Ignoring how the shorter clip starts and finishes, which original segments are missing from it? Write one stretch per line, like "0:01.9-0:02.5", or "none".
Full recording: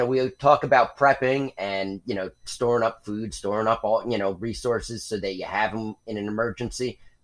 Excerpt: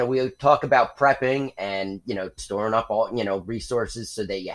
0:02.4-0:03.3